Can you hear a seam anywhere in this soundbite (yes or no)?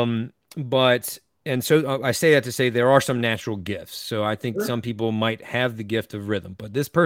no